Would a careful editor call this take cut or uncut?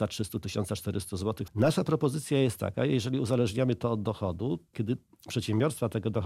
cut